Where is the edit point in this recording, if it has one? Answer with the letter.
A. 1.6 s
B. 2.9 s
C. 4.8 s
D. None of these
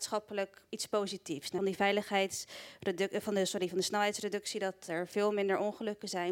A